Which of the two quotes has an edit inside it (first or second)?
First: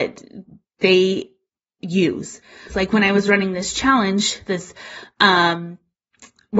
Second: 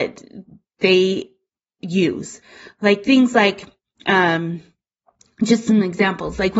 first